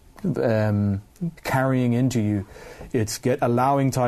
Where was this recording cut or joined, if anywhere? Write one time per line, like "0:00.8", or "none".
0:01.3
0:02.9